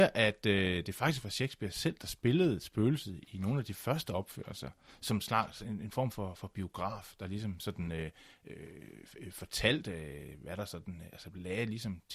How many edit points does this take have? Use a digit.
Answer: 0